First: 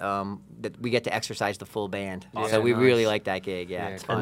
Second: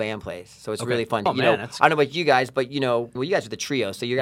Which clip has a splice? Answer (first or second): second